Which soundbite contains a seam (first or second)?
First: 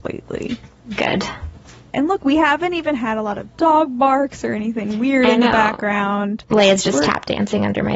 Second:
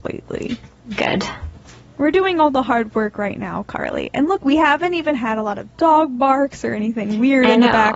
first